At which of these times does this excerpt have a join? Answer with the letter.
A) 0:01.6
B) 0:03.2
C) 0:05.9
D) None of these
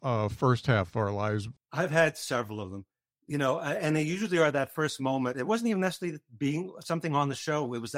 A